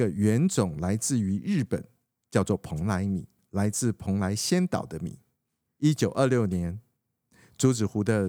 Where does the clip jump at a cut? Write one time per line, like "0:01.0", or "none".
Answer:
0:02.1